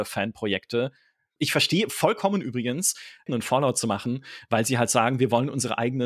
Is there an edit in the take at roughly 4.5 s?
no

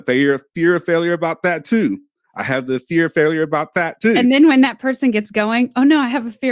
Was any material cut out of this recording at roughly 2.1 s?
no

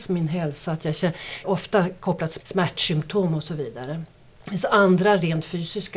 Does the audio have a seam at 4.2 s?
no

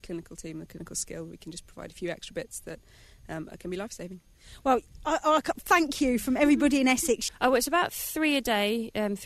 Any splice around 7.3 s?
yes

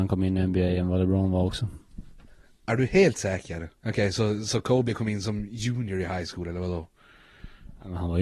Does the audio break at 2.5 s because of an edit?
no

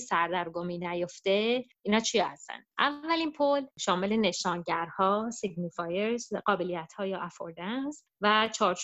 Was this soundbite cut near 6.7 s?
no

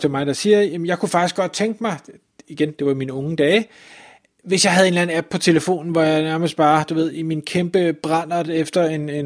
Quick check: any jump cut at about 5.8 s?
no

